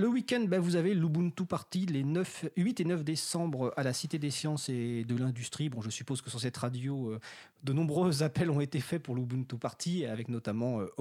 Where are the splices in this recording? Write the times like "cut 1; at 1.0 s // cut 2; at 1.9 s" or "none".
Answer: none